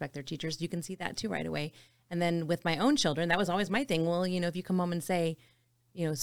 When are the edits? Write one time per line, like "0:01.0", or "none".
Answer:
none